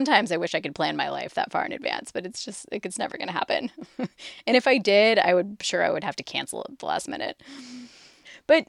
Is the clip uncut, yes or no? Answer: yes